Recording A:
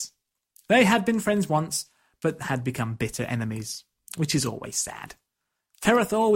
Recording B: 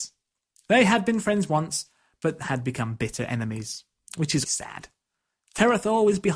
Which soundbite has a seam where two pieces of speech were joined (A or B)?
B